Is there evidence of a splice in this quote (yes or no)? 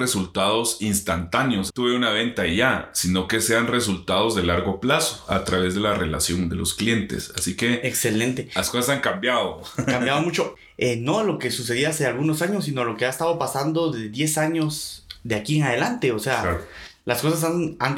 yes